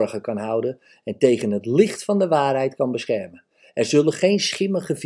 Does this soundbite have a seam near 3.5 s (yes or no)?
no